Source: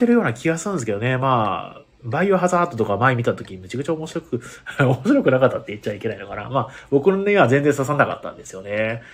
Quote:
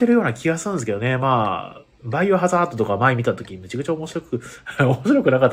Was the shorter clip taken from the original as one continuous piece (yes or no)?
yes